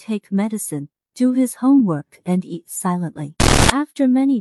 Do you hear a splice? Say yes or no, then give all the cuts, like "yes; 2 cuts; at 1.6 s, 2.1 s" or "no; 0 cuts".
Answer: no; 0 cuts